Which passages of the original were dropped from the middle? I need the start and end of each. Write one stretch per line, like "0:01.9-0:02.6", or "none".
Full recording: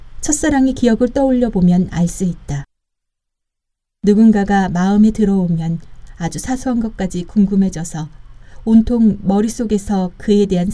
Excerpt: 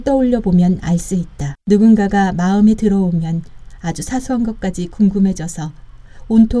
0:02.7-0:04.0